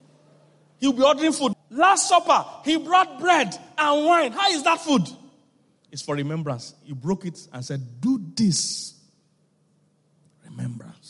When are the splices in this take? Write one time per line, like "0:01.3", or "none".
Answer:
0:01.5